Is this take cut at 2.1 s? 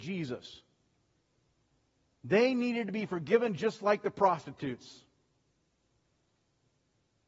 no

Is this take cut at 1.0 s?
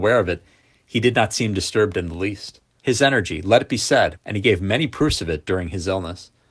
no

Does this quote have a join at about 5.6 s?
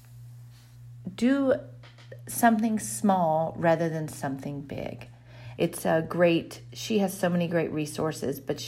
yes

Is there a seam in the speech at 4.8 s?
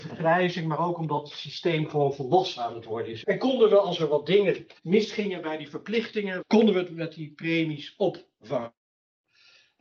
yes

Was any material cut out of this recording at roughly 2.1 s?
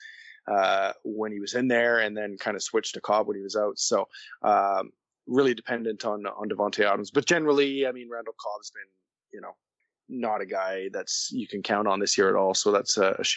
no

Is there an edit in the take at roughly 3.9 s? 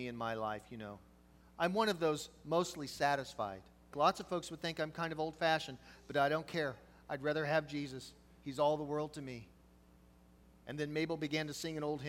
yes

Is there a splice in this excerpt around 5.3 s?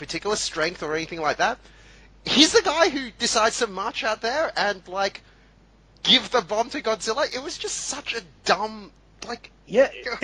no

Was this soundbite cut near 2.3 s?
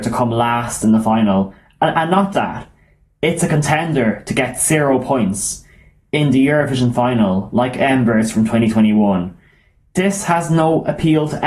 yes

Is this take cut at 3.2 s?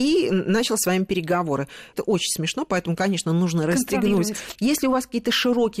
no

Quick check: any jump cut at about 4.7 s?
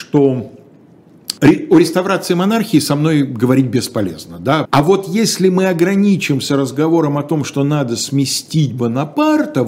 yes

